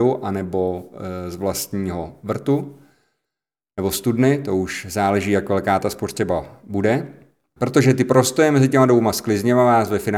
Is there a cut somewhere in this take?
yes; 1 cut; at 7.6 s

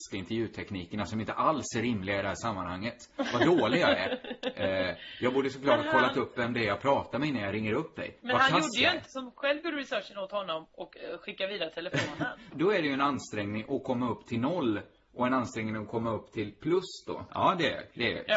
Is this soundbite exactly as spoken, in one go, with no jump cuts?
no; 3 cuts; at 9.1 s, 12.5 s, 17.3 s

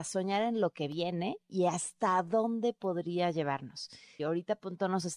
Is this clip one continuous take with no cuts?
no; 1 cut; at 4.2 s

